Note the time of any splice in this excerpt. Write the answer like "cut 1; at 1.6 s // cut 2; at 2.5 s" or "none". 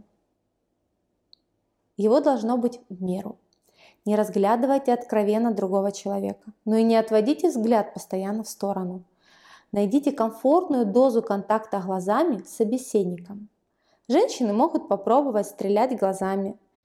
cut 1; at 1.8 s